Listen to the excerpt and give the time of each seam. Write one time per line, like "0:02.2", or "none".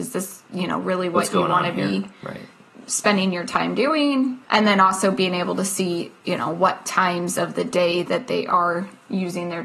0:04.4